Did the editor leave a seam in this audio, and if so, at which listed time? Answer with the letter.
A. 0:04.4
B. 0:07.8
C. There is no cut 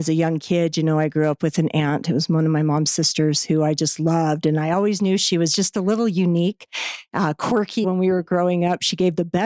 B